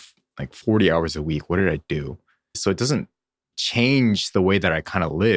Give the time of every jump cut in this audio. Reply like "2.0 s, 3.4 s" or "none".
2.5 s